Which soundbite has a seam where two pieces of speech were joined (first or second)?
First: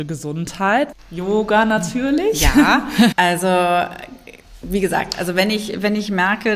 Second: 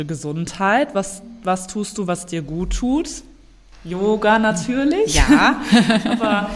first